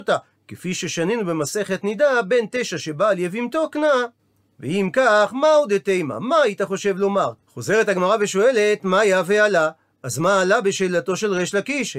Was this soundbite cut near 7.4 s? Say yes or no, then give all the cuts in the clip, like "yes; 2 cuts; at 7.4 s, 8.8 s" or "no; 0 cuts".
yes; 1 cut; at 7.4 s